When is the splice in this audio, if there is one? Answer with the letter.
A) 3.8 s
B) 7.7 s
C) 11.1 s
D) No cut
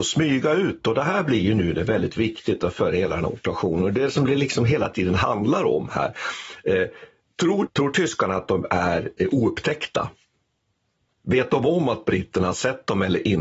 B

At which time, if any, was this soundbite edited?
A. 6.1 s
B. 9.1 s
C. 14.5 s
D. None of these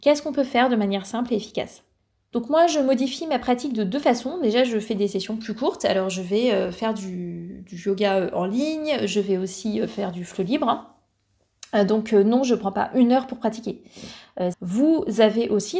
C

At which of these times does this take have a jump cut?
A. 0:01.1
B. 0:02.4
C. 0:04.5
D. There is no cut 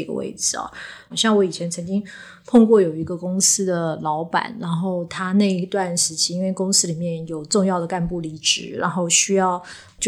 A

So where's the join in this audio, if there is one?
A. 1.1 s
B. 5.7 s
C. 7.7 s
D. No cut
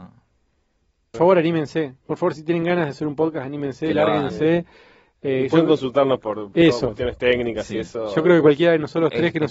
A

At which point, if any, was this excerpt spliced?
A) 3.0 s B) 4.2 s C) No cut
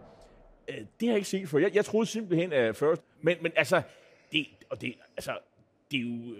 A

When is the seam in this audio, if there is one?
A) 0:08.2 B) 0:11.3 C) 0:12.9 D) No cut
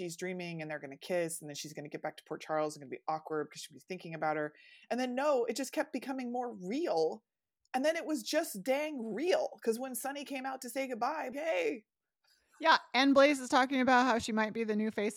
B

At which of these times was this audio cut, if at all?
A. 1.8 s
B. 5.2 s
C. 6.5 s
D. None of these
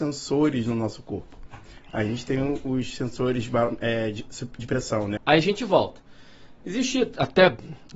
B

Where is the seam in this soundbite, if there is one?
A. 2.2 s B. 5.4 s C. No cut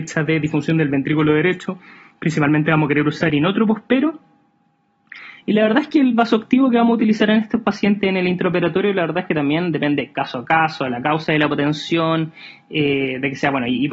B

